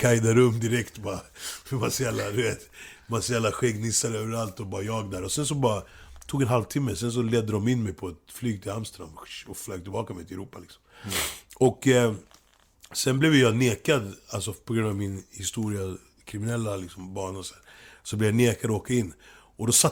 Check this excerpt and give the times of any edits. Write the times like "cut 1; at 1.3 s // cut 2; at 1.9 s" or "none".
none

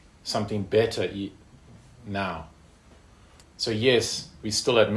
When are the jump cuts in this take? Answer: cut 1; at 3.4 s

